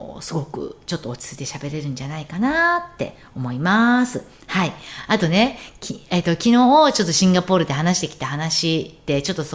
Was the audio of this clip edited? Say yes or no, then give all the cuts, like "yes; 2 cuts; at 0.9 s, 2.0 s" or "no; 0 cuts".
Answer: no; 0 cuts